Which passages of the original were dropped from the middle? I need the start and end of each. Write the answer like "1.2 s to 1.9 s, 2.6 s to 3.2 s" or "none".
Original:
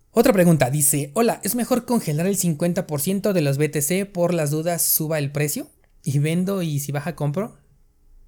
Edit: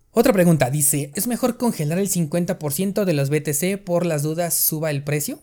1.1 s to 1.4 s